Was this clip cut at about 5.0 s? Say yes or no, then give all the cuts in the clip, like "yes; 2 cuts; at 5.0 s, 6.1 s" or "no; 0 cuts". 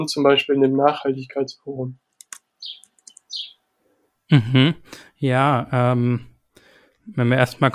no; 0 cuts